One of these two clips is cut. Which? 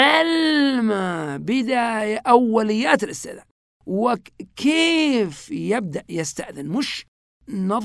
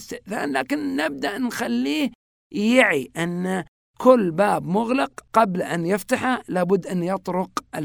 second; 1 cut; at 5.3 s

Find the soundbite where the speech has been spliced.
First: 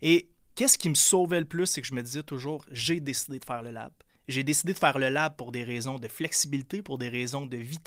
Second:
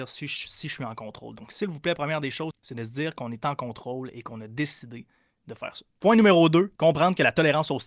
second; 1 cut; at 2.5 s

